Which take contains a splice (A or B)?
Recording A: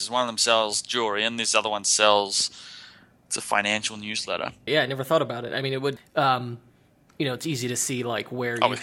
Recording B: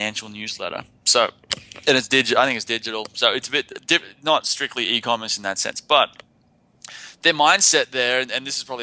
A